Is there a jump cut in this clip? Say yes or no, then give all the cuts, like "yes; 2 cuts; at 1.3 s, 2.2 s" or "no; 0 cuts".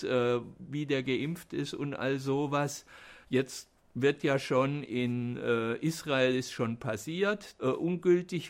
yes; 2 cuts; at 3.2 s, 7.6 s